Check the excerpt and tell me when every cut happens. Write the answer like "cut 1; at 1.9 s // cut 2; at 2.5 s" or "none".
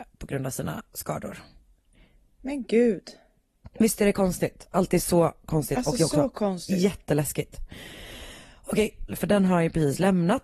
cut 1; at 9.1 s